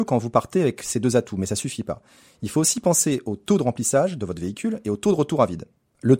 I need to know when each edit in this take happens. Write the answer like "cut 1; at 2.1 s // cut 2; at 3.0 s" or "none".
none